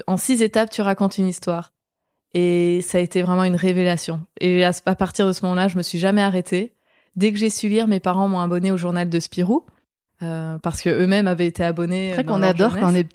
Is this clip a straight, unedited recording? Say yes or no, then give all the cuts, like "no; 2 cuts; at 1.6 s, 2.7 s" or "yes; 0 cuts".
yes; 0 cuts